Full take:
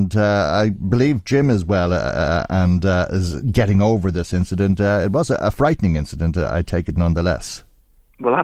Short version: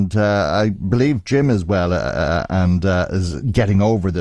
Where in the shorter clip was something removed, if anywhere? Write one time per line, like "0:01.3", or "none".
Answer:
none